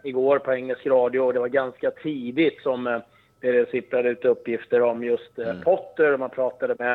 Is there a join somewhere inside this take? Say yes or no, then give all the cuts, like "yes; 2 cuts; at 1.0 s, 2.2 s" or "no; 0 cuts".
no; 0 cuts